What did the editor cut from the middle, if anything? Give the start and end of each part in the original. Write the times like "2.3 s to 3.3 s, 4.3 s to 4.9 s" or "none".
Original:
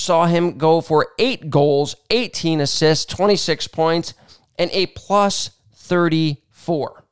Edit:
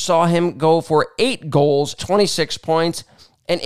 2.0 s to 3.1 s